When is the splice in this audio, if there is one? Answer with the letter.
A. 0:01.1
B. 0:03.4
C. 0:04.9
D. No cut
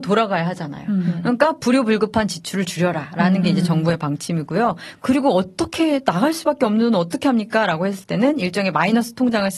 D